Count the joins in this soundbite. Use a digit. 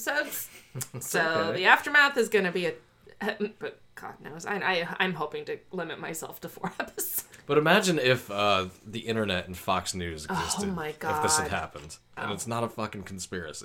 3